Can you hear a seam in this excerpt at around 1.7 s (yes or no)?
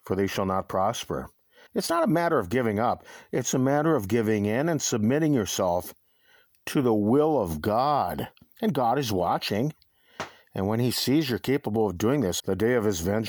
yes